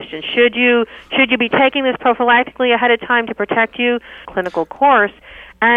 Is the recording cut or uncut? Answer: cut